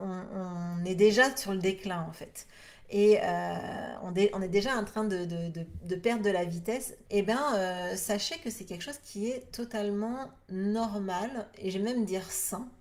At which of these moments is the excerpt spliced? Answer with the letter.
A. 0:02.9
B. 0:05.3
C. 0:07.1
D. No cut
C